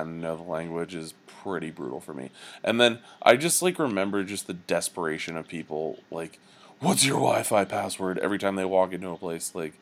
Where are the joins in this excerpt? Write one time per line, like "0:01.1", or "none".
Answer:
none